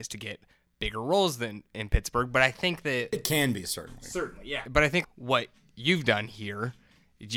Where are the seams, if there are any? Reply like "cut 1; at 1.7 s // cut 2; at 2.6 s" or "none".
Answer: cut 1; at 5.0 s